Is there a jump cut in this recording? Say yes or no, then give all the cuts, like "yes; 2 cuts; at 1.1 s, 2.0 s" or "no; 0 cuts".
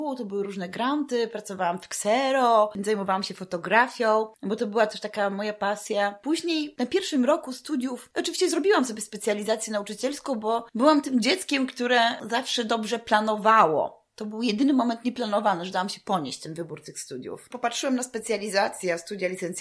no; 0 cuts